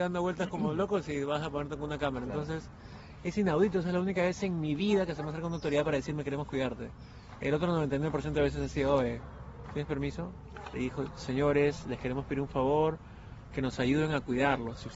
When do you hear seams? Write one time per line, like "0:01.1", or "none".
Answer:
0:10.7